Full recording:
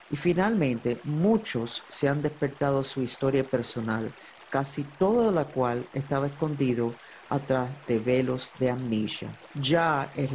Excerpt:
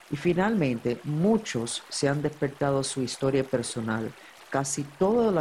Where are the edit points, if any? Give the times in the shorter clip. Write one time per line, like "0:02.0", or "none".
none